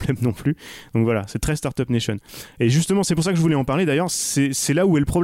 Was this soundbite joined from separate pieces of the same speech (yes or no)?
no